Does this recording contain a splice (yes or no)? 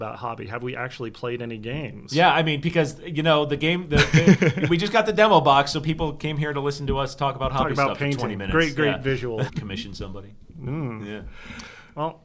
yes